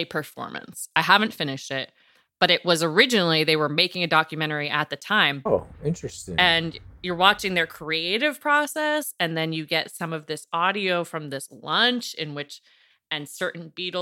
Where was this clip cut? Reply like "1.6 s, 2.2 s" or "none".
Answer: 5.5 s

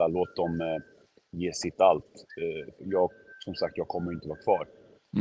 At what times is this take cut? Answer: 2.8 s

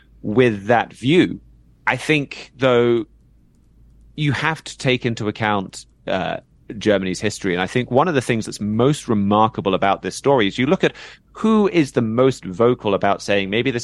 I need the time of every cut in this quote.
none

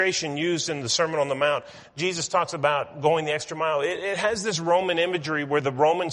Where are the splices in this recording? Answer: none

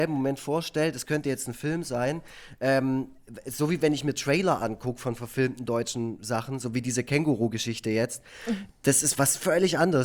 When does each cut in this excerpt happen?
none

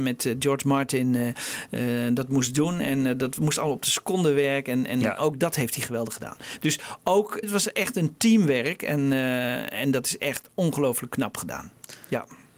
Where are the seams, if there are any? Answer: 7.4 s

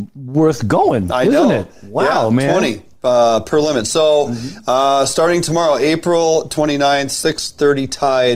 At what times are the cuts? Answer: none

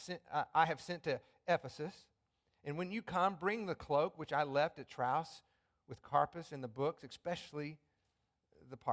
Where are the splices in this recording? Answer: none

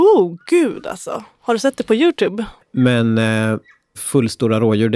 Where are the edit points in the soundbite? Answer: 2.6 s

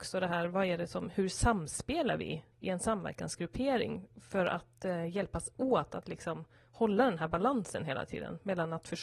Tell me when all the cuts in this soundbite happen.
2.5 s

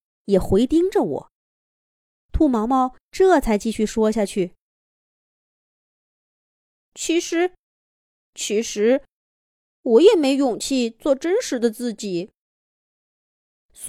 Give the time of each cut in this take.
2.2 s

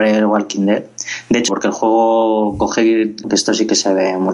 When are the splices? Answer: 1.5 s, 3.2 s

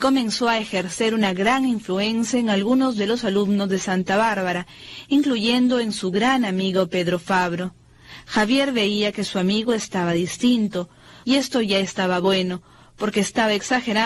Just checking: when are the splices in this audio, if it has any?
11.2 s

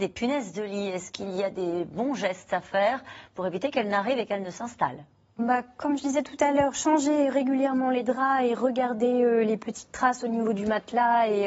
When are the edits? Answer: 5.4 s

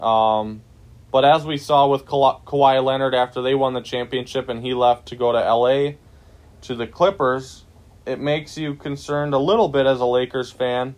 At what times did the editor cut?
8.0 s

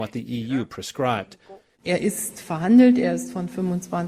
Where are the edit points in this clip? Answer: 1.7 s

